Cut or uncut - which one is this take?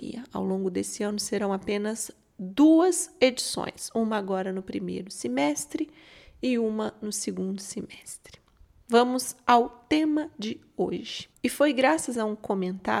cut